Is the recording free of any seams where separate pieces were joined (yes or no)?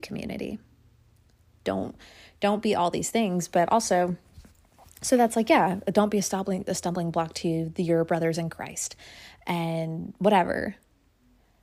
no